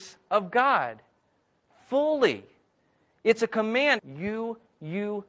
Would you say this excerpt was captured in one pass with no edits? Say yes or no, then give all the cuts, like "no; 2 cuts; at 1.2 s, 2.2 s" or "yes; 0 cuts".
no; 1 cut; at 4.0 s